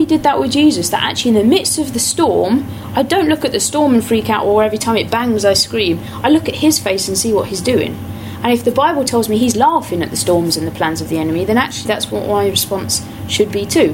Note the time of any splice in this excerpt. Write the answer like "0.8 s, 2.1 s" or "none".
11.8 s